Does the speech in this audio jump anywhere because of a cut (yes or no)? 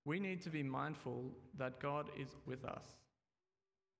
yes